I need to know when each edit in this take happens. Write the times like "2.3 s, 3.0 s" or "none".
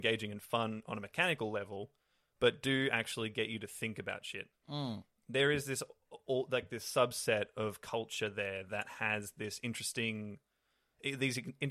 4.6 s